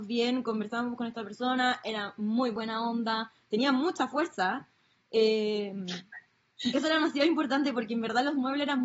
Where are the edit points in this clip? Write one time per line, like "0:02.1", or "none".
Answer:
none